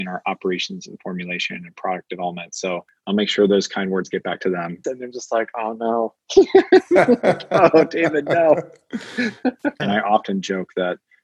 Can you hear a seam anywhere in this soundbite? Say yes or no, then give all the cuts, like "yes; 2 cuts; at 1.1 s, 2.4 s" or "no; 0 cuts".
yes; 2 cuts; at 4.8 s, 9.8 s